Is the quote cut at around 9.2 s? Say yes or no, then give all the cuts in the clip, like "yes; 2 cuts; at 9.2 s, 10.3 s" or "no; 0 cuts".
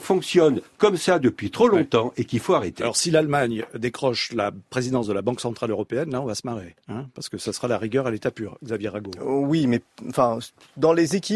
no; 0 cuts